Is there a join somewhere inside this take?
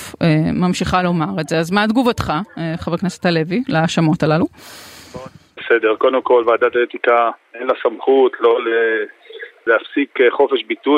yes; 1 cut; at 9.7 s

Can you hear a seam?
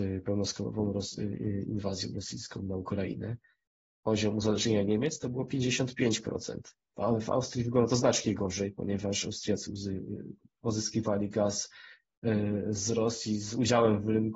yes; 1 cut; at 6.9 s

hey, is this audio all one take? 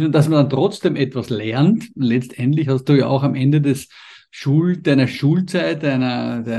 yes; 0 cuts

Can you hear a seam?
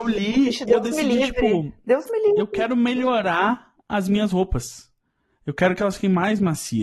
no; 0 cuts

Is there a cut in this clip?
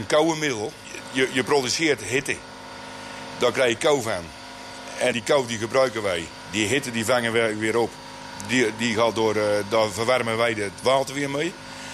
yes; 1 cut; at 5.1 s

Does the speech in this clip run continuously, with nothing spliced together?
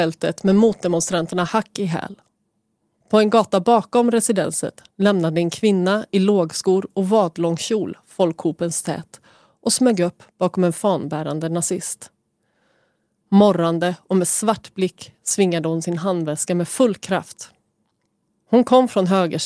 yes; 0 cuts

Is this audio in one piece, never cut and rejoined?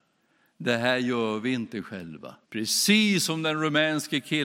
no; 1 cut; at 2.4 s

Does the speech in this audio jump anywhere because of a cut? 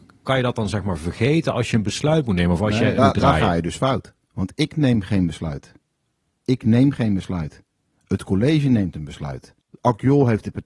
yes; 1 cut; at 3.0 s

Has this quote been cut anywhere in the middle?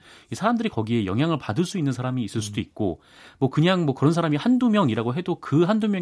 no; 0 cuts

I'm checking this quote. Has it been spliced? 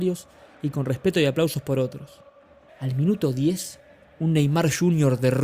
yes; 1 cut; at 2.7 s

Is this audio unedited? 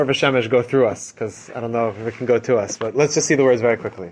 yes; 0 cuts

